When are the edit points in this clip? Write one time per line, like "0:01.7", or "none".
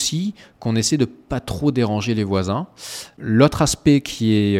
none